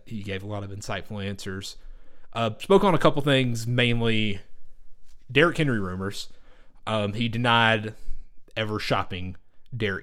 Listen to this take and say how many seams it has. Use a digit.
0